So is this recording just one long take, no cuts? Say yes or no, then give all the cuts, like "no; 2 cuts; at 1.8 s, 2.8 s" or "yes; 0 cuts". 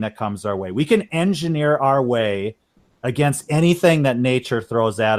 yes; 0 cuts